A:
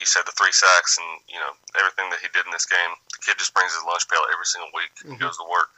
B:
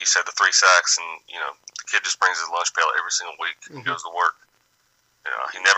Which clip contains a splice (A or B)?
B